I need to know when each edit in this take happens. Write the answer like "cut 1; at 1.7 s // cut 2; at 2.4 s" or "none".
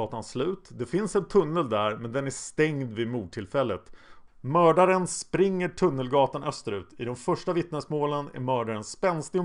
cut 1; at 4.3 s